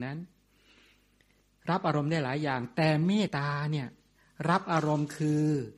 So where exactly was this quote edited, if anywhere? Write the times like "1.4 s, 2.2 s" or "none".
3.3 s